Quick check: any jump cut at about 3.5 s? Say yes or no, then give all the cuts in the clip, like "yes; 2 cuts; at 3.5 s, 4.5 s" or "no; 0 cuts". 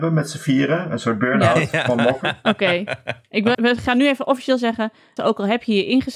yes; 2 cuts; at 3.5 s, 5.2 s